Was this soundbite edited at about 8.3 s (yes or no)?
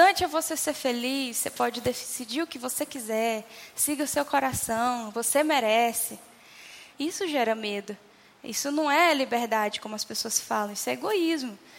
no